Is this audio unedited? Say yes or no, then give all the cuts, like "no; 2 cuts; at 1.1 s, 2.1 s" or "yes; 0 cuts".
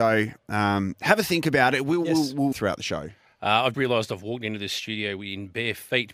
no; 2 cuts; at 2.5 s, 3.7 s